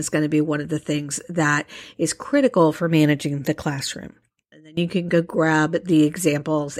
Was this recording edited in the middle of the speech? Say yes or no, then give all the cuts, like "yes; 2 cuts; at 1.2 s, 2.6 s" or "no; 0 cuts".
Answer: yes; 1 cut; at 4.5 s